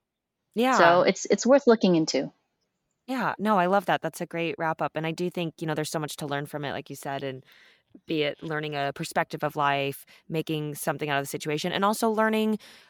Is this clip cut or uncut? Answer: uncut